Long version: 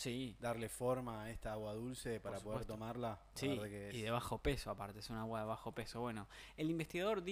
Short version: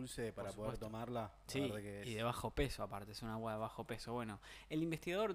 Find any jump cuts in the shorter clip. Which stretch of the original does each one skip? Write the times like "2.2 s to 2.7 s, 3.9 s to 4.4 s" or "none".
none